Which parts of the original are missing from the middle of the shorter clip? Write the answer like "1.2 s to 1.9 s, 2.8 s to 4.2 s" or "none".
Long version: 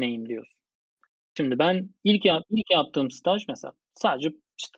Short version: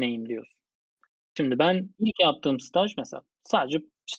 2.0 s to 2.5 s